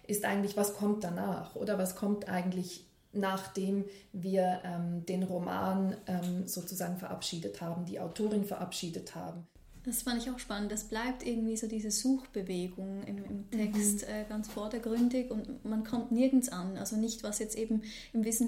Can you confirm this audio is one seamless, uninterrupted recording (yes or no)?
yes